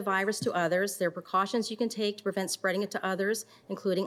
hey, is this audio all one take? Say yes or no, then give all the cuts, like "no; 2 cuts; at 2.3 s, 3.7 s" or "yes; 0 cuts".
yes; 0 cuts